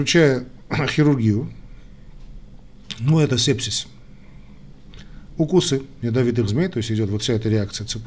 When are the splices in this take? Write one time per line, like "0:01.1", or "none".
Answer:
none